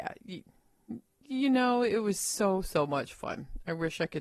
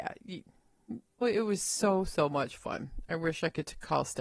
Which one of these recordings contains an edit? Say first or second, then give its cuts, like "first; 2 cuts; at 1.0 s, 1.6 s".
second; 1 cut; at 1.2 s